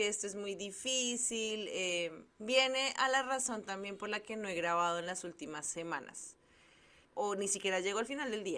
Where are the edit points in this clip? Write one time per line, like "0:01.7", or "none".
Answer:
0:02.3
0:07.0